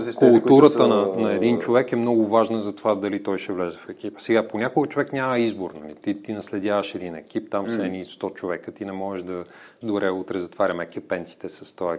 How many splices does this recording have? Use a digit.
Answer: 1